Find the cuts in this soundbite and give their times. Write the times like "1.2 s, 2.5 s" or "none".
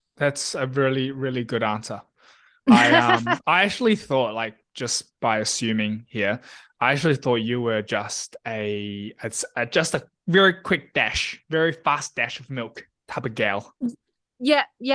none